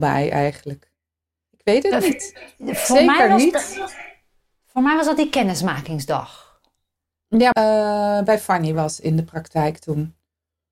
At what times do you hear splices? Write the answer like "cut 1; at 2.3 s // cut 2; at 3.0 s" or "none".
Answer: cut 1; at 7.5 s